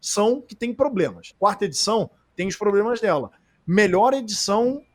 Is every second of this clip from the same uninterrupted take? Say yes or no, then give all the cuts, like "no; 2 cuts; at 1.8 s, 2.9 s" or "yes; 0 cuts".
no; 1 cut; at 1.3 s